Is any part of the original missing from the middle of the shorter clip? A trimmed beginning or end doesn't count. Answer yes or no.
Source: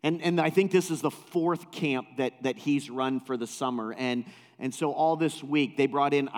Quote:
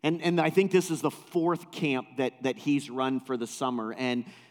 no